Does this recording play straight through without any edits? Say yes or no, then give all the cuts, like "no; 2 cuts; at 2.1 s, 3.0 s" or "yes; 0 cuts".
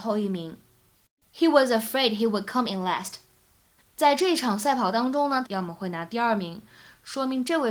no; 2 cuts; at 3.8 s, 5.5 s